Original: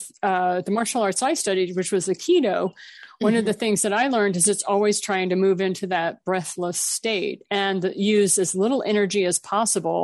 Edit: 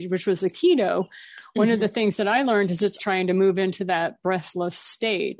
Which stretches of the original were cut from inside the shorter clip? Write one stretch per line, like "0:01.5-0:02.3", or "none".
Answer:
0:04.6-0:05.0